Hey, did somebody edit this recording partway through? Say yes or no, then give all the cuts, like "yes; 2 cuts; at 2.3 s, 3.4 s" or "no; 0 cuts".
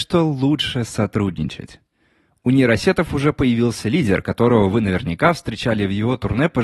no; 0 cuts